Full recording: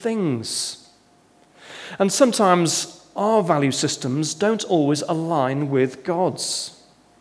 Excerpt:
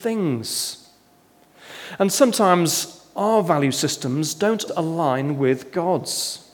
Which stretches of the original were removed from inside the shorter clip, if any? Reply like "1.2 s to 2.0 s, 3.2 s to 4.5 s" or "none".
4.7 s to 5.0 s